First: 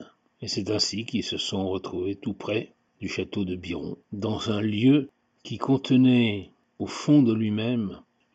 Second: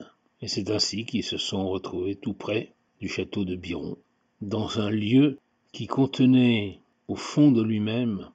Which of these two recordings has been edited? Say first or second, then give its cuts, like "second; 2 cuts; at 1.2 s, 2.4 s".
first; 1 cut; at 4.0 s